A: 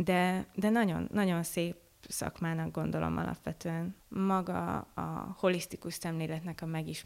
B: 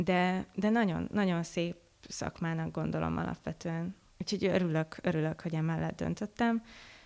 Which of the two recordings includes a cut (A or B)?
A